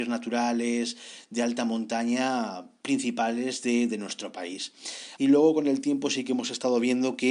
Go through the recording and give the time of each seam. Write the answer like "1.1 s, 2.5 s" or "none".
5.2 s